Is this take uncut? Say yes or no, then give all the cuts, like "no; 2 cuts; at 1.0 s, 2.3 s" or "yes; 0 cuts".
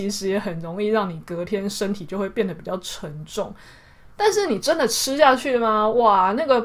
no; 1 cut; at 4.1 s